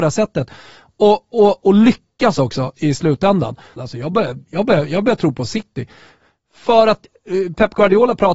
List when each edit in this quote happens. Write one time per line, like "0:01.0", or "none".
0:03.8